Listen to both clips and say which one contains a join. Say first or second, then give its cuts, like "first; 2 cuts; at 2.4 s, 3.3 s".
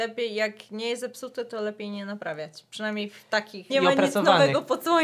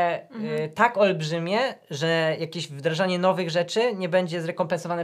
first; 1 cut; at 3.7 s